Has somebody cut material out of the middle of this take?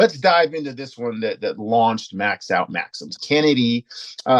yes; 1 cut; at 3.2 s

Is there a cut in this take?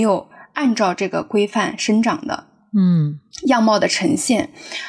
no; 0 cuts

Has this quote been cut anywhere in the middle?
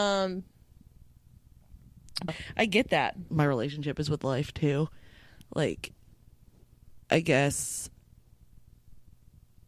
yes; 2 cuts; at 2.3 s, 3.3 s

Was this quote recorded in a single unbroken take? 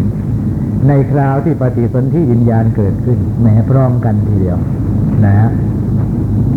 yes; 0 cuts

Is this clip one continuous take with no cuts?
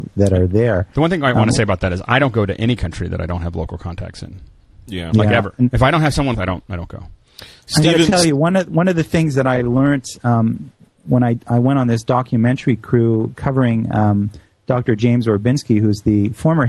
no; 1 cut; at 6.3 s

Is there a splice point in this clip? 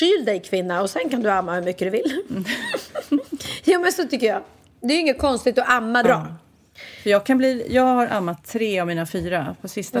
yes; 1 cut; at 6.0 s

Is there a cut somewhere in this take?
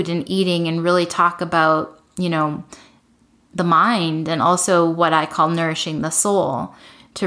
no; 0 cuts

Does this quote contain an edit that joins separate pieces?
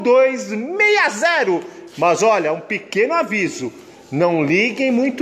no; 0 cuts

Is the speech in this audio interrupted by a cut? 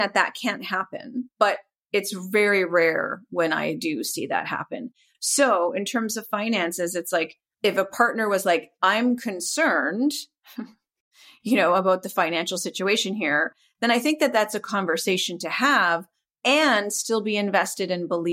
no; 0 cuts

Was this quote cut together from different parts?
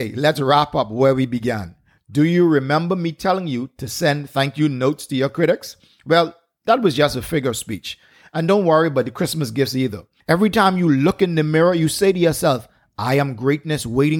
yes; 1 cut; at 10.2 s

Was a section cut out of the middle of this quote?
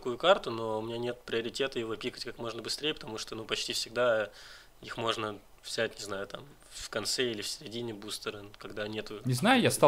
no; 0 cuts

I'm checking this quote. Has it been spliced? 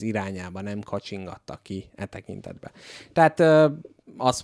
no; 0 cuts

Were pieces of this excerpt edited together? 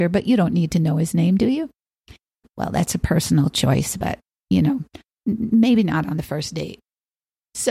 yes; 1 cut; at 2.4 s

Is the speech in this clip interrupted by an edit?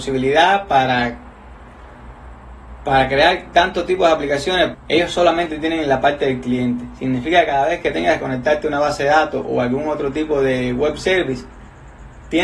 yes; 1 cut; at 4.7 s

